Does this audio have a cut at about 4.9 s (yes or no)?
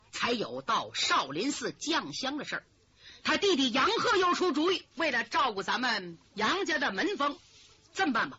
yes